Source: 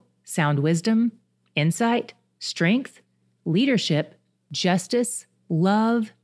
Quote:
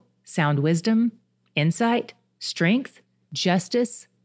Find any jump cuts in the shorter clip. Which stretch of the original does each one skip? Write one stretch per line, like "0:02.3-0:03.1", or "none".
0:03.2-0:04.4